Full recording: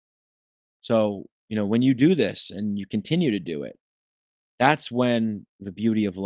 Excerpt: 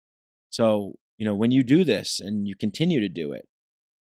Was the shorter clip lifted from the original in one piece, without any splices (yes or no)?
yes